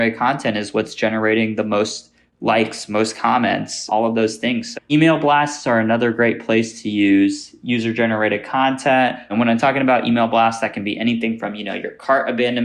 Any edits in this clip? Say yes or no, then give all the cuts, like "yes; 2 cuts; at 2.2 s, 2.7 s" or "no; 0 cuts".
yes; 1 cut; at 4.7 s